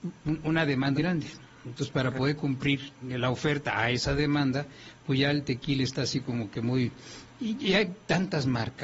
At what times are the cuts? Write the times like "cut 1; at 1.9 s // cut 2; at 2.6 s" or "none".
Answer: cut 1; at 0.9 s // cut 2; at 3.0 s

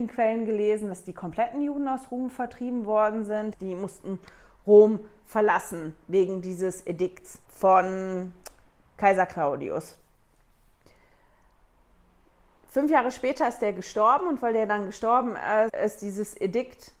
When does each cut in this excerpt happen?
cut 1; at 3.5 s // cut 2; at 7.4 s // cut 3; at 15.7 s

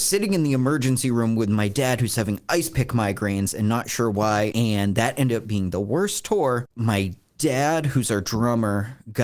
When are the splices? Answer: cut 1; at 4.5 s

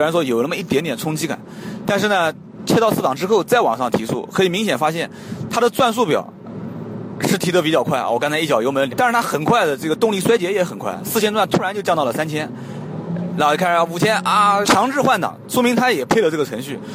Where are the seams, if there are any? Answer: cut 1; at 8.9 s // cut 2; at 14.6 s

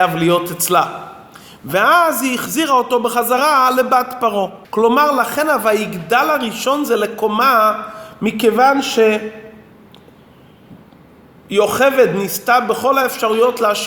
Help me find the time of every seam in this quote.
cut 1; at 4.6 s

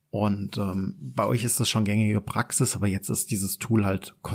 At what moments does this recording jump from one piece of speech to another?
none

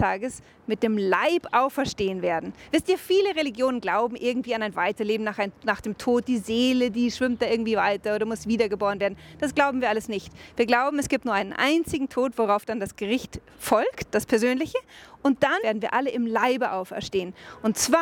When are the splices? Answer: cut 1; at 15.6 s

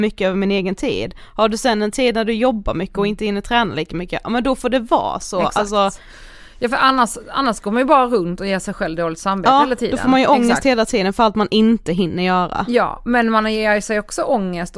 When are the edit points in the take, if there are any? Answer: none

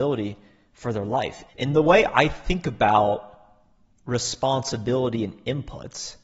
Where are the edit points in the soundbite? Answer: cut 1; at 1.5 s

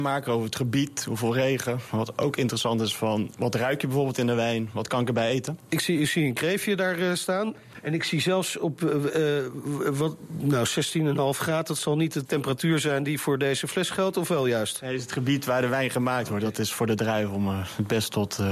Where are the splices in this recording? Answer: none

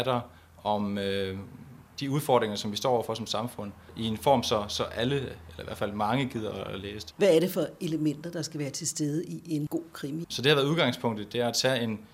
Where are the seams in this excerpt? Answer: cut 1; at 7.1 s // cut 2; at 10.2 s

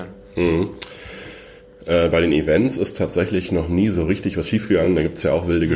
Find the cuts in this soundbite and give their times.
none

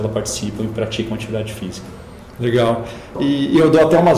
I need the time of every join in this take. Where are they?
cut 1; at 3.1 s

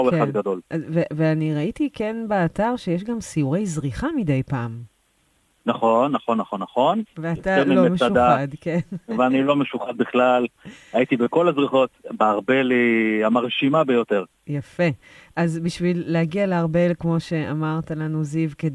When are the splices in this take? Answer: cut 1; at 7.1 s

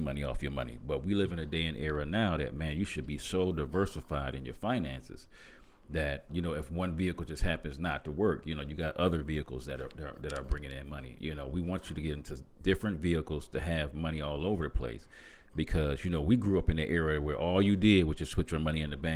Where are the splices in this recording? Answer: cut 1; at 6.3 s // cut 2; at 11.2 s

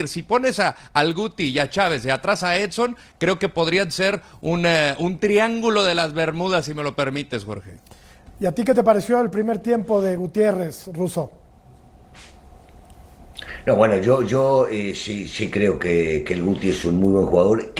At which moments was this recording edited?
none

